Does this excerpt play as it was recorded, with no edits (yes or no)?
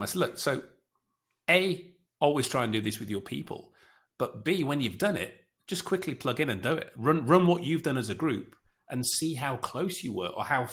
yes